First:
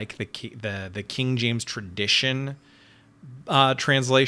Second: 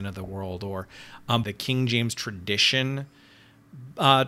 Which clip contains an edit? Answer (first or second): second